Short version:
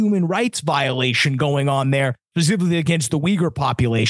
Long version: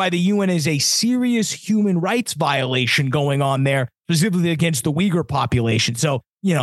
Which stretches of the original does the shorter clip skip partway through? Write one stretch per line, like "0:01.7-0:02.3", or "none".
none